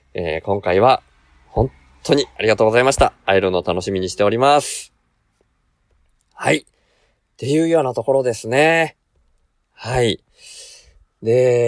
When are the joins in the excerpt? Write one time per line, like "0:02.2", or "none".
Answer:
none